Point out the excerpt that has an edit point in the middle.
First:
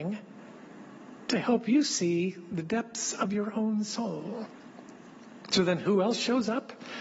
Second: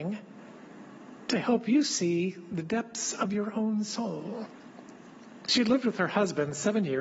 second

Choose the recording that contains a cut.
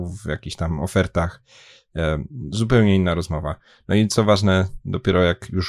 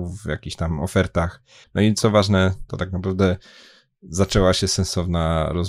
second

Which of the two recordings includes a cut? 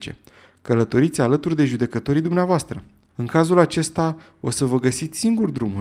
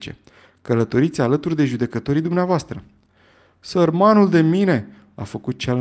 first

